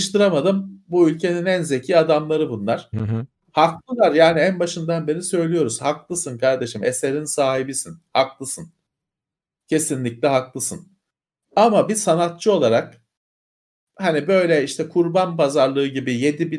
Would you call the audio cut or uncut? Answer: uncut